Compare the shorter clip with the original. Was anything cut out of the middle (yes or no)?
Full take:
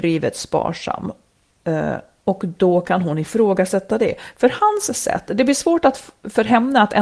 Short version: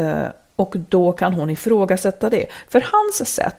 no